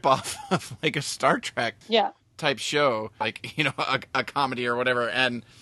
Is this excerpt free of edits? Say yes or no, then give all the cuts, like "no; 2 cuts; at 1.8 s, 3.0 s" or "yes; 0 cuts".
no; 2 cuts; at 1.8 s, 3.2 s